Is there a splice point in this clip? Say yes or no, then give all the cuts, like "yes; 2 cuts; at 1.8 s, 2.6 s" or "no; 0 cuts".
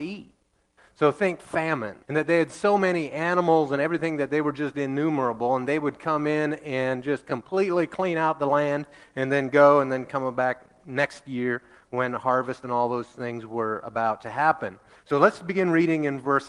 yes; 2 cuts; at 2.0 s, 15.0 s